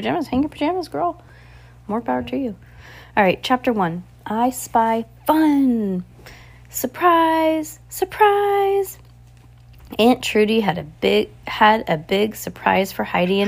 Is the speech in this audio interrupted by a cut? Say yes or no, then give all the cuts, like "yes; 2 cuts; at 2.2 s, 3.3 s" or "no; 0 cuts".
no; 0 cuts